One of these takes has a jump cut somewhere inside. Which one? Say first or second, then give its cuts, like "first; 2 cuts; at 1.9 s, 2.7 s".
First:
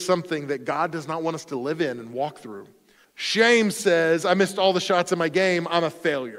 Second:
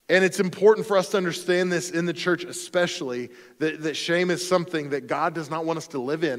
first; 1 cut; at 3.0 s